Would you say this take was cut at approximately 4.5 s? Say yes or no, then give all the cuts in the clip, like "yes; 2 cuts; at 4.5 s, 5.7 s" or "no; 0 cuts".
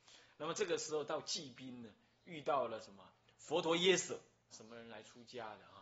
yes; 1 cut; at 4.5 s